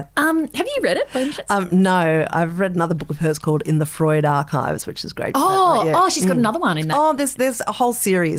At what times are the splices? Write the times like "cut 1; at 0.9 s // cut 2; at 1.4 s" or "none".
none